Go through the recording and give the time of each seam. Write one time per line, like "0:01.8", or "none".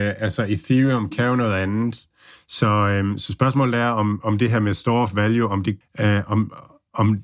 0:02.3
0:05.8